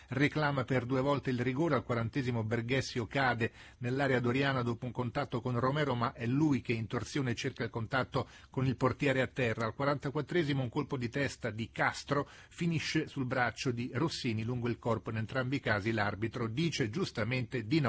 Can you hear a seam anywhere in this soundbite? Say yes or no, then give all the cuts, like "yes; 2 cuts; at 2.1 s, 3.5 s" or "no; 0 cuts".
no; 0 cuts